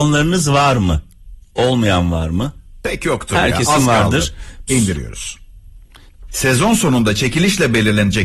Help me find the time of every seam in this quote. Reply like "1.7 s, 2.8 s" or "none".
4.7 s, 6.3 s